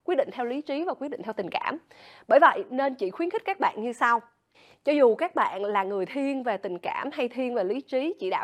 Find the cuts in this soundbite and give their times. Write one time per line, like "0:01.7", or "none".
none

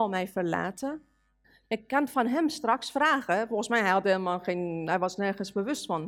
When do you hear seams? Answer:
0:01.6

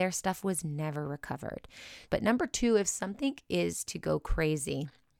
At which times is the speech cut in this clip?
0:02.1

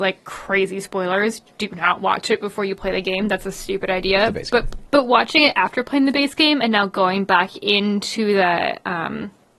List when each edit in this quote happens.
0:04.9

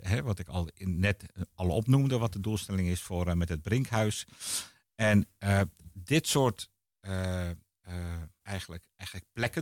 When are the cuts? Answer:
0:08.4

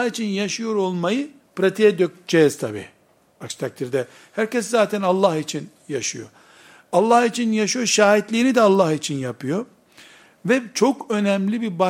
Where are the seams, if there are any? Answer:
none

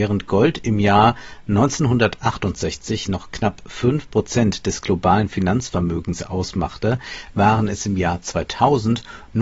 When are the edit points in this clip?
none

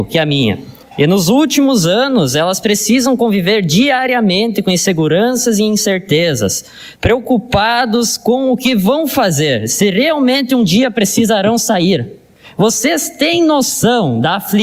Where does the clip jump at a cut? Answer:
0:06.9

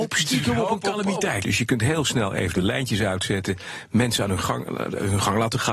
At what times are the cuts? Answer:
0:01.4

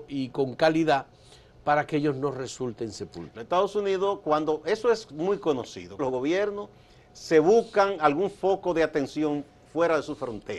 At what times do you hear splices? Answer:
0:03.3
0:06.0

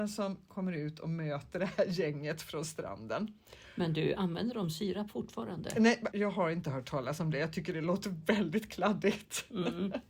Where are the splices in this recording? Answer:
0:06.1

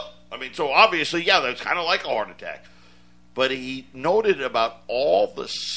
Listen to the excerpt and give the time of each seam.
none

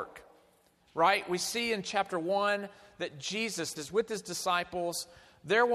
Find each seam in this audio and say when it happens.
0:03.8

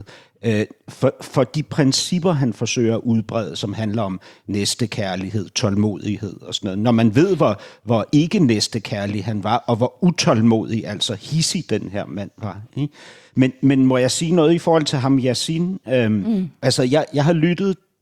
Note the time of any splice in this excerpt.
none

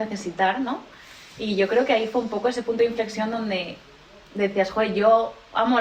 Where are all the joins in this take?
none

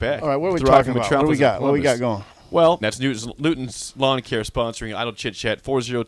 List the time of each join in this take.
0:02.8

